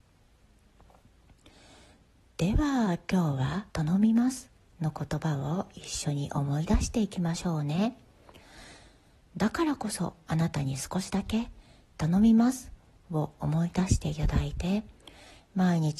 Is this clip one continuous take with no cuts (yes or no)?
no